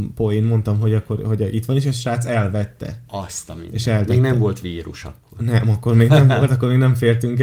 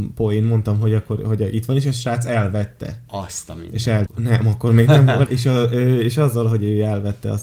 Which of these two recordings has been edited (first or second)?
second